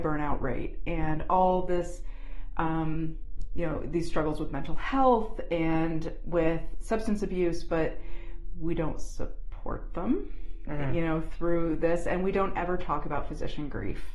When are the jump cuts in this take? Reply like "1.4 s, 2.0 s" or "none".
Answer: 6.2 s